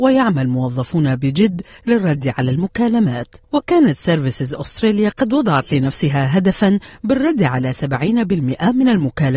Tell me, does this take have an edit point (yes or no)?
yes